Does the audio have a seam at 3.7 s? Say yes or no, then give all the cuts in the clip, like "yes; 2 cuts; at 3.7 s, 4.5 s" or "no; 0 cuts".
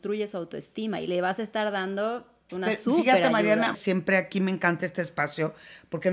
yes; 2 cuts; at 2.5 s, 3.7 s